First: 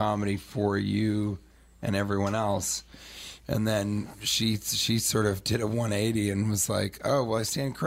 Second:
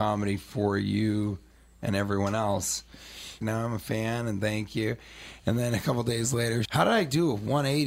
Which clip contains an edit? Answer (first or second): second